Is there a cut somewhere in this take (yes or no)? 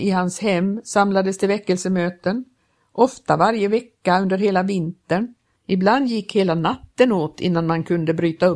yes